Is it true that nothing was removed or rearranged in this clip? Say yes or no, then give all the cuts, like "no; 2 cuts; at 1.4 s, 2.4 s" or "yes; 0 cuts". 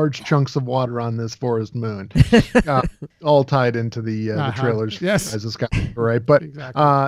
yes; 0 cuts